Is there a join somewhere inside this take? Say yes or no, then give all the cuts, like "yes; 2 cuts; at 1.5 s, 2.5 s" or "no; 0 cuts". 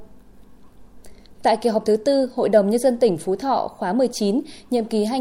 no; 0 cuts